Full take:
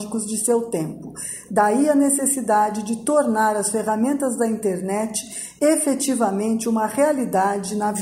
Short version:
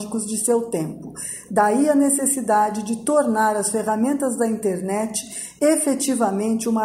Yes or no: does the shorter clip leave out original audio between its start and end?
no